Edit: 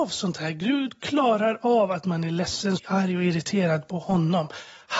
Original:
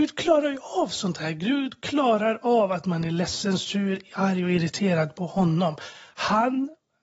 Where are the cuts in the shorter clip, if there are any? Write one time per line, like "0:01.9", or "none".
0:02.8

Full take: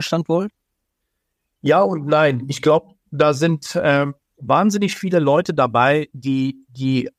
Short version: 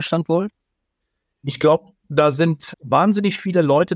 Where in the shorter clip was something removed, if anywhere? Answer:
0:01.4
0:02.7

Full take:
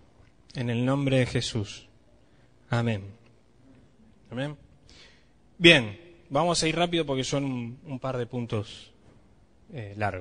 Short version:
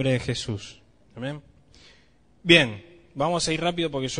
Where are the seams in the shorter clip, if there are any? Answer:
0:01.0

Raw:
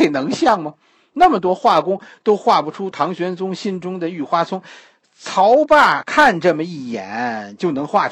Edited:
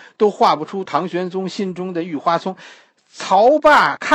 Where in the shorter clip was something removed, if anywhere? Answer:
none

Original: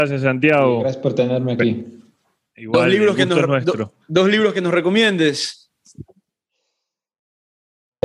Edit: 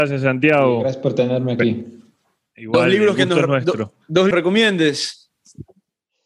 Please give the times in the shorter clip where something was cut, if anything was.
0:04.3

